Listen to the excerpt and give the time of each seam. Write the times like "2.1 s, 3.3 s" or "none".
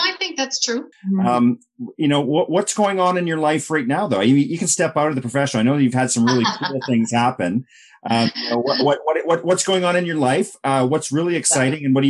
0.9 s